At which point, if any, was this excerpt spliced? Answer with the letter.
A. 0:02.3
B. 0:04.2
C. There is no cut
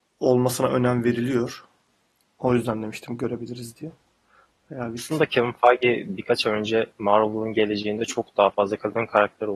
C